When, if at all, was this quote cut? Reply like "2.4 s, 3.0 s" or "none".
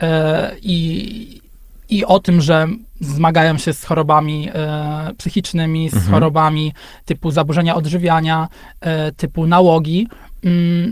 none